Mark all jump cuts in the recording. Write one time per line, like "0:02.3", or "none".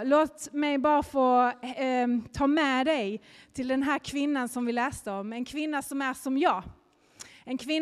none